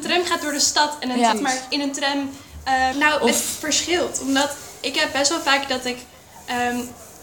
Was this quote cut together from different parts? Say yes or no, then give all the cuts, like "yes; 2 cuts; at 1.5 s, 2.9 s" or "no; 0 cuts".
yes; 2 cuts; at 1.3 s, 2.9 s